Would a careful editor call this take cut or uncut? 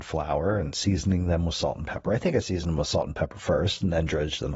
uncut